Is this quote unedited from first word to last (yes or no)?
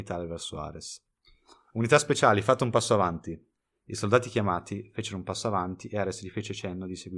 yes